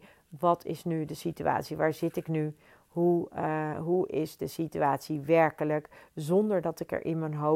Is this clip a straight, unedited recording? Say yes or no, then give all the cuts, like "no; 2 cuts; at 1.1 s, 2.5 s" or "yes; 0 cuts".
yes; 0 cuts